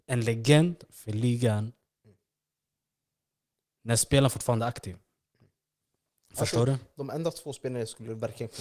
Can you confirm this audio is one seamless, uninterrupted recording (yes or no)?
yes